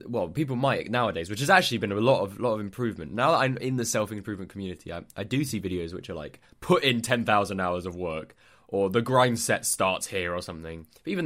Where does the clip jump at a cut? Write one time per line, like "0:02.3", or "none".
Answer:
none